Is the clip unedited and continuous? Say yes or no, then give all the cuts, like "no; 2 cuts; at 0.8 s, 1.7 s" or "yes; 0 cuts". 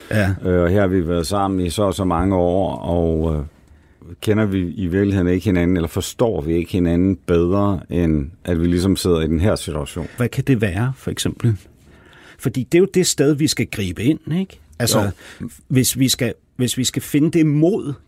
no; 1 cut; at 10.2 s